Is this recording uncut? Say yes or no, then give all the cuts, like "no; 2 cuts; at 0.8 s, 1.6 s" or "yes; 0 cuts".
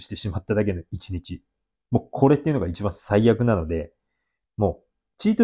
yes; 0 cuts